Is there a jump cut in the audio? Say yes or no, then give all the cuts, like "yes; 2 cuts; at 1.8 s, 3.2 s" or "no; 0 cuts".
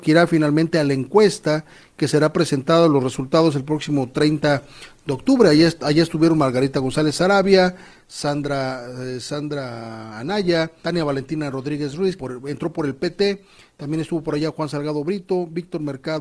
yes; 2 cuts; at 10.8 s, 12.2 s